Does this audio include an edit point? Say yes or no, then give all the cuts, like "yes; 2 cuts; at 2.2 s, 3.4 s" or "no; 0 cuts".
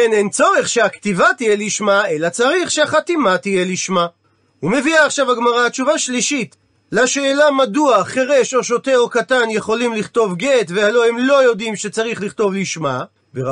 no; 0 cuts